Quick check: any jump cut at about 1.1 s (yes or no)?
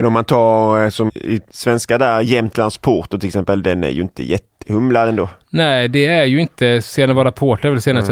yes